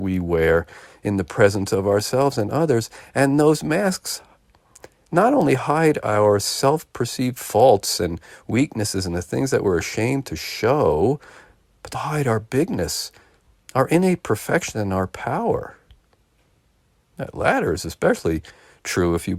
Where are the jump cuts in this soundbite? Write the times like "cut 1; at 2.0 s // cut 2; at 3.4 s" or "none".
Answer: cut 1; at 11.9 s